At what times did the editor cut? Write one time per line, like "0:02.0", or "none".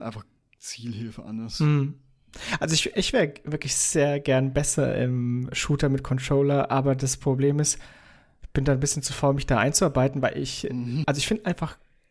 0:11.0